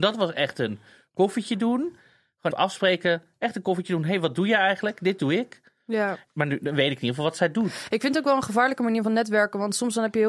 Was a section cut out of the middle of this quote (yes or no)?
yes